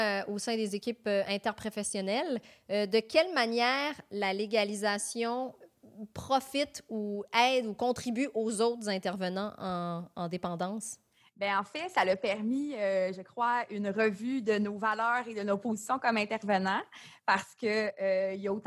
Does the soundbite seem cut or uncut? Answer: uncut